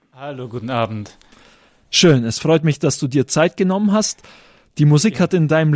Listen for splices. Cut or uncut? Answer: uncut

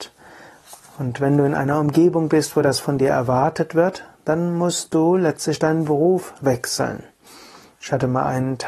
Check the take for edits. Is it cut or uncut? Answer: uncut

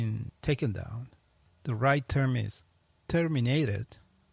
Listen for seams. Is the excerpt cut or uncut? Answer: uncut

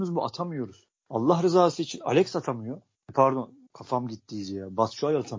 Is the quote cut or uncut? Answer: uncut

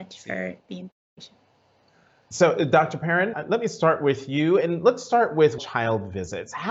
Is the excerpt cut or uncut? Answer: cut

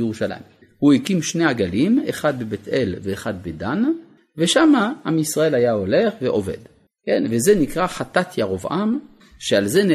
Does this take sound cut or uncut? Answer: uncut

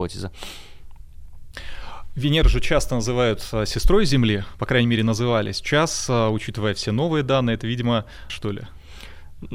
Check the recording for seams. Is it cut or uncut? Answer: cut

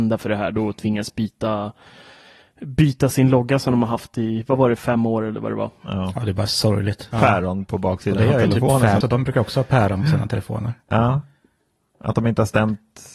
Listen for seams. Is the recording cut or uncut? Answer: cut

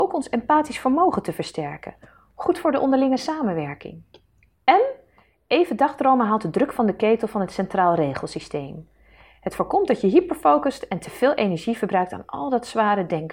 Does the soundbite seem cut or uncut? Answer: uncut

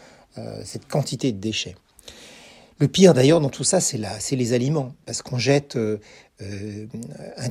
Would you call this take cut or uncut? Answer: uncut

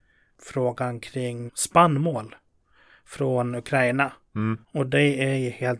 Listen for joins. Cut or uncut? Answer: cut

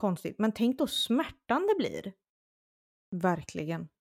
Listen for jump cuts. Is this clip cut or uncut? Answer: cut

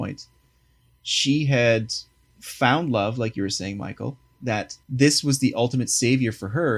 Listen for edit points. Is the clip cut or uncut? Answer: cut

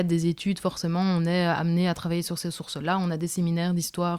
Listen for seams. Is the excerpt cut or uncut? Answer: uncut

